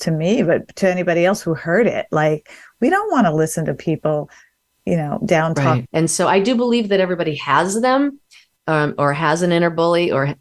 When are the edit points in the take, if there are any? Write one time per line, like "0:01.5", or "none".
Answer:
0:05.9